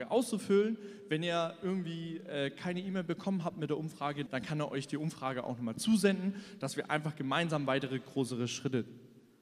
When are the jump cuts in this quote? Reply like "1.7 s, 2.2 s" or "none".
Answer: 4.3 s